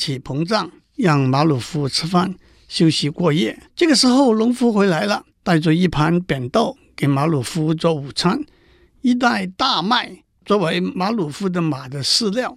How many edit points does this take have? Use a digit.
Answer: 2